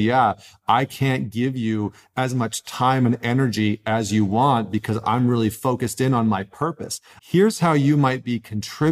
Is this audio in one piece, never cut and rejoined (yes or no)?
no